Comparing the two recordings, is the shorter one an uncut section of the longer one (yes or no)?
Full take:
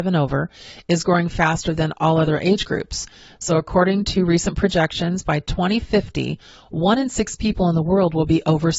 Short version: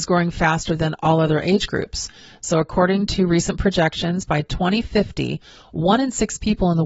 yes